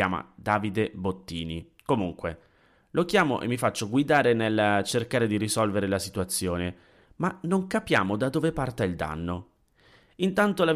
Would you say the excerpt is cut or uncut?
cut